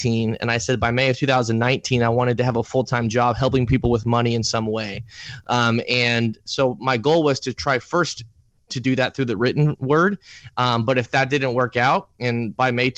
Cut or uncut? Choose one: uncut